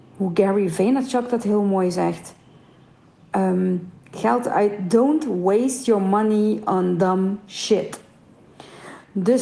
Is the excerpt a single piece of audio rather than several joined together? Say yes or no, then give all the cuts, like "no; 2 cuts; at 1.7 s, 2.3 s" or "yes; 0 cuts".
yes; 0 cuts